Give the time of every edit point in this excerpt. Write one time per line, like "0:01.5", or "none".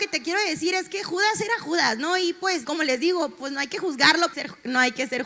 0:02.6
0:04.3